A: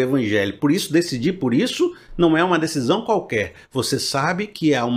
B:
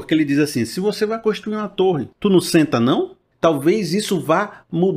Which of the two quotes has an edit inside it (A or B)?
B